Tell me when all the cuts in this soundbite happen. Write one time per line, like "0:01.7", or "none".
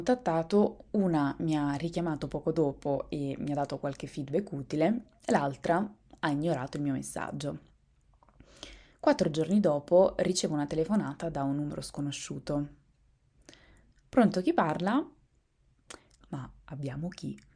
0:16.2